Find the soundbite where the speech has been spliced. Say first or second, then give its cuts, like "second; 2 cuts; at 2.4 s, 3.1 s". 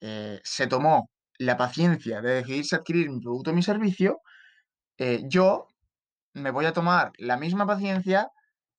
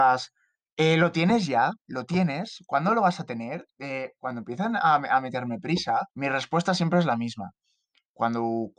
second; 2 cuts; at 1.8 s, 6.1 s